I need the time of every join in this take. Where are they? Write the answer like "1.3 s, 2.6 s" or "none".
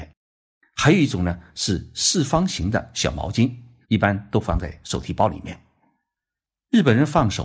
3.8 s